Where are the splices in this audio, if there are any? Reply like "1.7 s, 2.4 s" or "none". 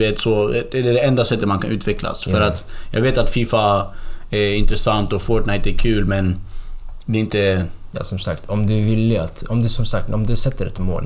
none